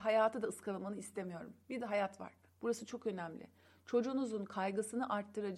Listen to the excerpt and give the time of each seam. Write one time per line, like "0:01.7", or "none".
0:02.5